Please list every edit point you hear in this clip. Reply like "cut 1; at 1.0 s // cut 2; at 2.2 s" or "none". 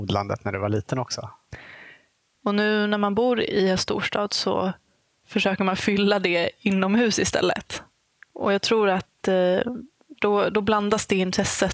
cut 1; at 2.4 s